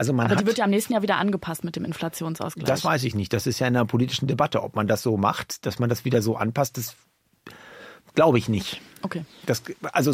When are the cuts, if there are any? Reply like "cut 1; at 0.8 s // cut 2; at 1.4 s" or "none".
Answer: none

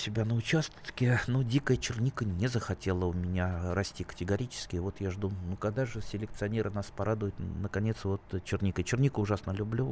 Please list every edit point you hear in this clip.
none

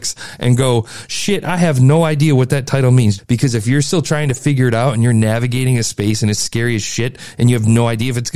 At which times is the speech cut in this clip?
cut 1; at 3.2 s

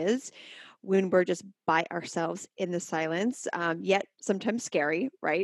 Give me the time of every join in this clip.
none

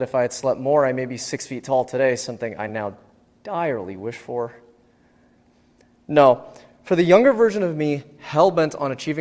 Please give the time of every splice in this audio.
none

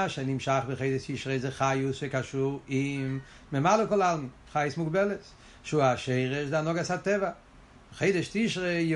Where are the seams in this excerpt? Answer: none

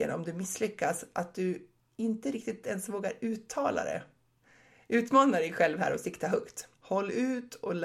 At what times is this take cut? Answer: cut 1; at 6.7 s

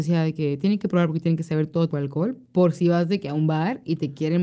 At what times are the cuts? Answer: cut 1; at 1.9 s

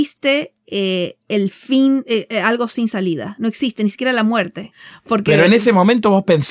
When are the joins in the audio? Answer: none

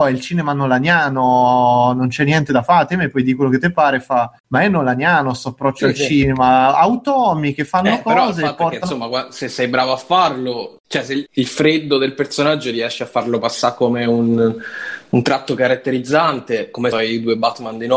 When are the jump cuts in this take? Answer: cut 1; at 11.3 s // cut 2; at 16.9 s

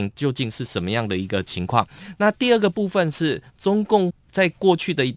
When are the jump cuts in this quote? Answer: none

